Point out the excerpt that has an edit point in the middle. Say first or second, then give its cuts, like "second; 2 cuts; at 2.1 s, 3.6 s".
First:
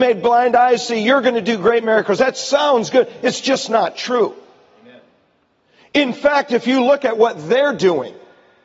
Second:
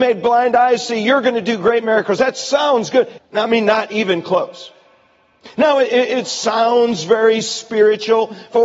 second; 1 cut; at 3.2 s